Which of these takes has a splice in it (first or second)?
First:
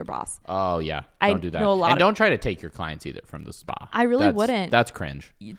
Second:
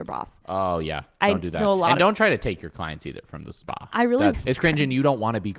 second